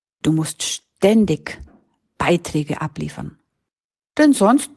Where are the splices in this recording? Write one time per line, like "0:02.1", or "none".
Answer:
none